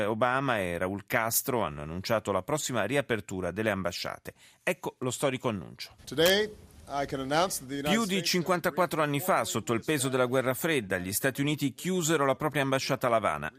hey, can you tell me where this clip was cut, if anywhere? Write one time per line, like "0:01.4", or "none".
0:06.0